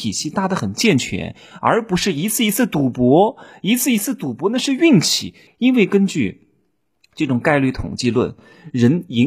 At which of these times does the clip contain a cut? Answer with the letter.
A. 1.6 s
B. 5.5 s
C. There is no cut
B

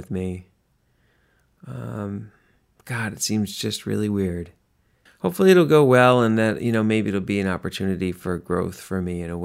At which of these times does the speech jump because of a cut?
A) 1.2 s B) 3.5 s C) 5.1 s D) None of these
C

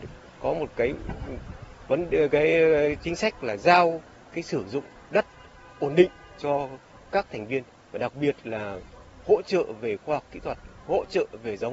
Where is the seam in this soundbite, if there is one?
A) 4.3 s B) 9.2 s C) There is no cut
A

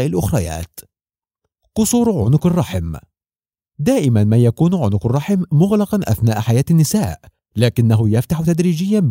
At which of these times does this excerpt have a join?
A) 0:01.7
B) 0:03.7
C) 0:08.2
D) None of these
D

